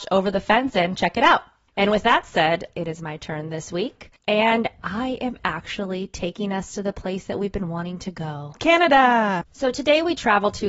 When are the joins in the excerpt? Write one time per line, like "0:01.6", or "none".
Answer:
0:04.2